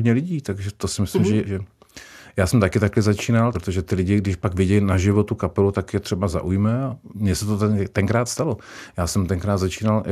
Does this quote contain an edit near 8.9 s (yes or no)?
no